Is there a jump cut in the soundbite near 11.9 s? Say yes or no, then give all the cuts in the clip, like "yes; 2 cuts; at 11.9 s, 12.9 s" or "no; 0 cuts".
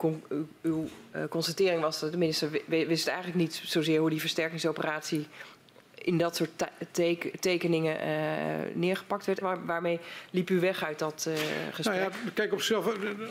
no; 1 cut; at 9.4 s